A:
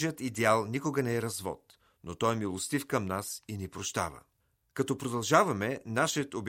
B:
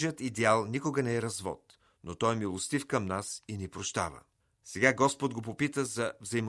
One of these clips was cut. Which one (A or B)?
B